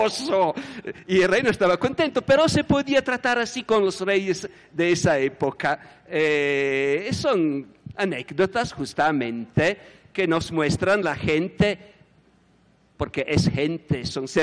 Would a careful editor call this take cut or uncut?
uncut